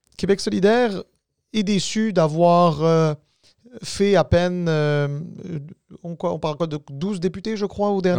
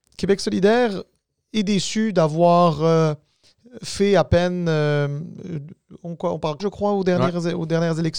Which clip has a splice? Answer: second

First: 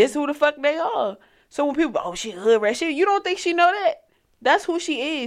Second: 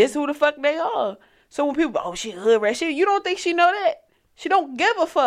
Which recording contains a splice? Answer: first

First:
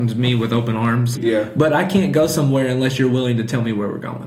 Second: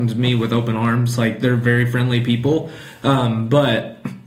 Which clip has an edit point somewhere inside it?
first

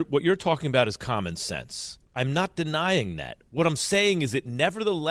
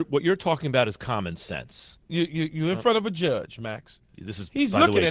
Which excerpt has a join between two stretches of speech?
second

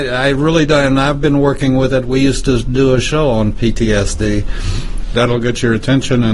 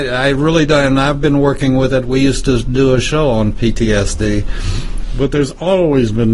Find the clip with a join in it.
first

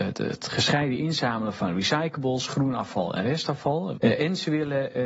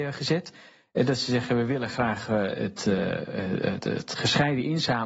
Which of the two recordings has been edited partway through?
first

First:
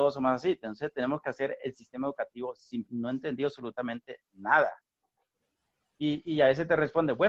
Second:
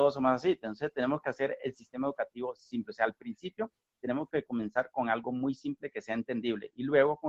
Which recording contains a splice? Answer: first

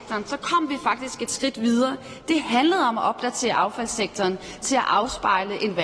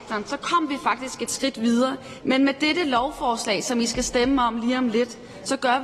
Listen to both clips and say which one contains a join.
second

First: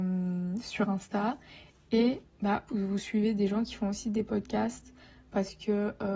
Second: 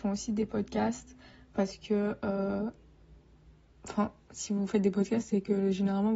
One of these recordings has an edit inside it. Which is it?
first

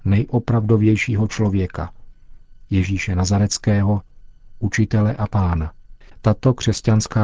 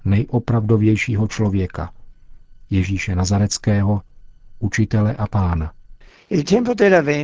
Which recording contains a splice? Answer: first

